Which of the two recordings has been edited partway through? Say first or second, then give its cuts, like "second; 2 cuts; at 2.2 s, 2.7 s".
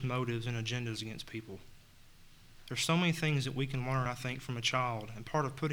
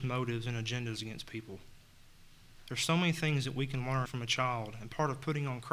second; 1 cut; at 4.1 s